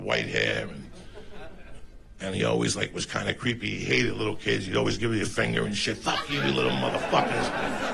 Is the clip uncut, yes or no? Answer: yes